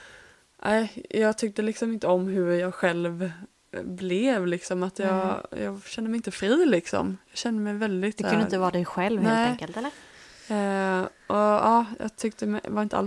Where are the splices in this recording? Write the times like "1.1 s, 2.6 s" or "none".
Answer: none